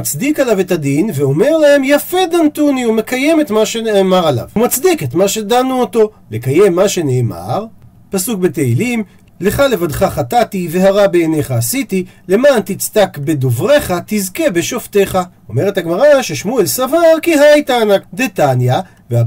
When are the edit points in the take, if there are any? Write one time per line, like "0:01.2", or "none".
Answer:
0:15.3
0:18.0